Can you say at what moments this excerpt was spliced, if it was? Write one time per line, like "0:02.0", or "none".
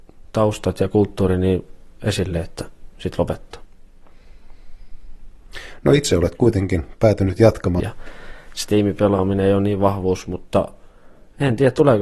0:07.8